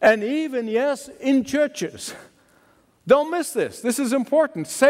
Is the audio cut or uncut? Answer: uncut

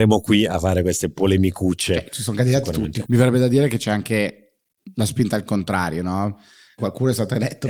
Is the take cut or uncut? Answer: cut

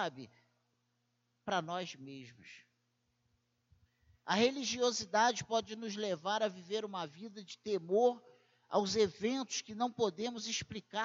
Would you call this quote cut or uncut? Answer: uncut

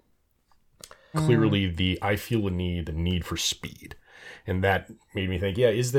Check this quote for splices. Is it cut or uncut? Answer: cut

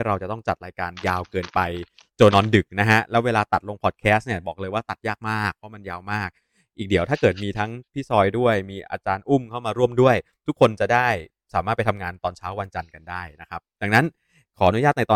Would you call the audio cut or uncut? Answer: cut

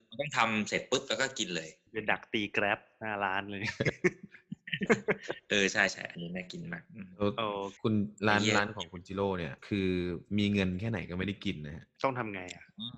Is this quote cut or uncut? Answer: cut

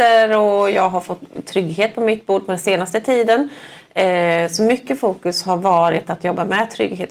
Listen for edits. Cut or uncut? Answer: uncut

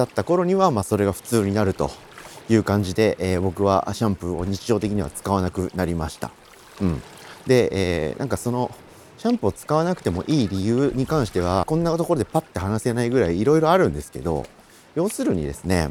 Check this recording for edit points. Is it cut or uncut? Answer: cut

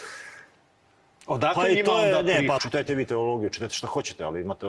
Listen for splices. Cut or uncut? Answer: cut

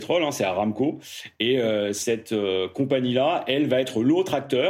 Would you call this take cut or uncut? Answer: uncut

